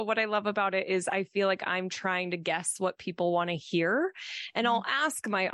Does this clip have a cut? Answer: no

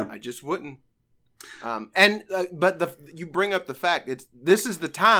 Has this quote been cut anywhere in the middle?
no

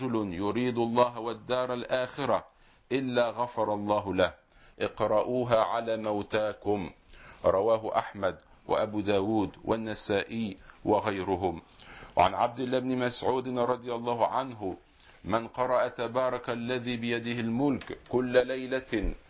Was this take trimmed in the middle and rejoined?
no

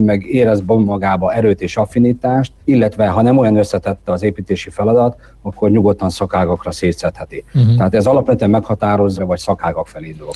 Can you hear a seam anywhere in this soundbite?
yes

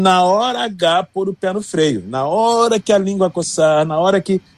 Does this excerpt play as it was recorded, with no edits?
yes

